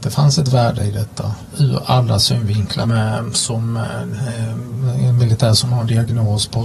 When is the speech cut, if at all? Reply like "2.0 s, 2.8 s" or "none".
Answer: 1.5 s, 2.8 s